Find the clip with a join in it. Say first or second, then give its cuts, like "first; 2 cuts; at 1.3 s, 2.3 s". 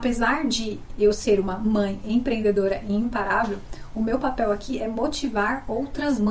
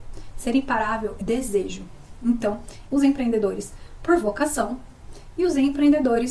second; 2 cuts; at 1.2 s, 2.9 s